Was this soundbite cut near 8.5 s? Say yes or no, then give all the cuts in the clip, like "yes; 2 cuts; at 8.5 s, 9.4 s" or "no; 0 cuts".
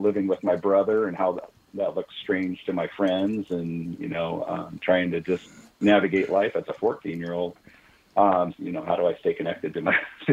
yes; 1 cut; at 8.5 s